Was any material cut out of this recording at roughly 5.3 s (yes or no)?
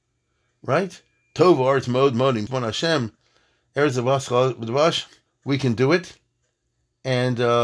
yes